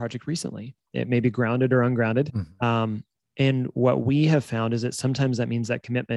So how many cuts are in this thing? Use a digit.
2